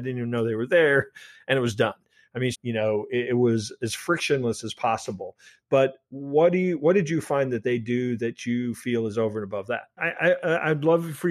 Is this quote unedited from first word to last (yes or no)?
no